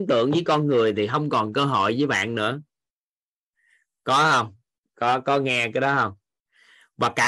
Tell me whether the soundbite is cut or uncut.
uncut